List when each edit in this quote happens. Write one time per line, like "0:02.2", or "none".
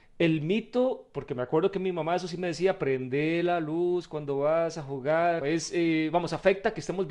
0:05.4